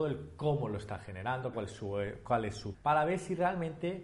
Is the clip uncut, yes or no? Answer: no